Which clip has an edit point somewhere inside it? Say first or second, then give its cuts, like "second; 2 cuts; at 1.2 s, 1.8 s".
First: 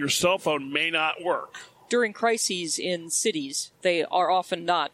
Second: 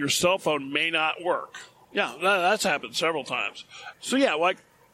second; 2 cuts; at 1.8 s, 3.9 s